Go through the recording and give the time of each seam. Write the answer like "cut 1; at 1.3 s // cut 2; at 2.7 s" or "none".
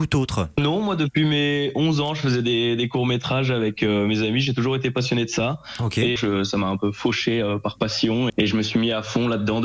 cut 1; at 6.2 s // cut 2; at 8.3 s

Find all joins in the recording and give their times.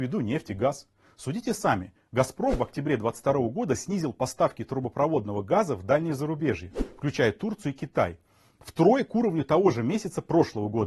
none

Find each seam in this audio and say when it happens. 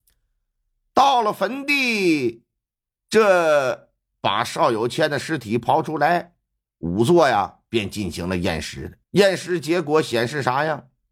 cut 1; at 9.0 s

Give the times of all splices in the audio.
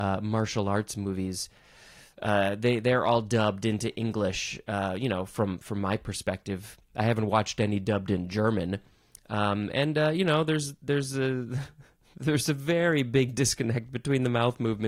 none

